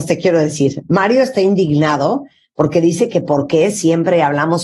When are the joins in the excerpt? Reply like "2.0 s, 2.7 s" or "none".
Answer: none